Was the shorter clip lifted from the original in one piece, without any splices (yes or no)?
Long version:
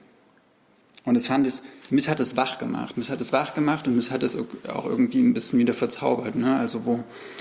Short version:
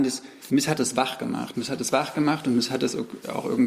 yes